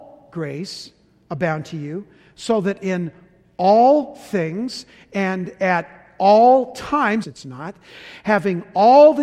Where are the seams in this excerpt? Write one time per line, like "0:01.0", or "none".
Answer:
0:07.2